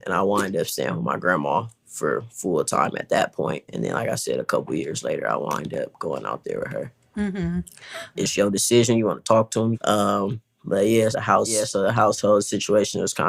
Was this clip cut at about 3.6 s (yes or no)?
no